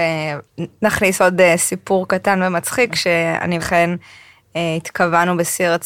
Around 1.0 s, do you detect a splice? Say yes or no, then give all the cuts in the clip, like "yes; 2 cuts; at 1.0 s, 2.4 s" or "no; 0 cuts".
no; 1 cut; at 3.6 s